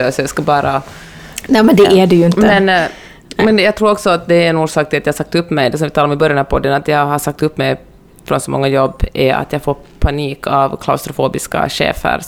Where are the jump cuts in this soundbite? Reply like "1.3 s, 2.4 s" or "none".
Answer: none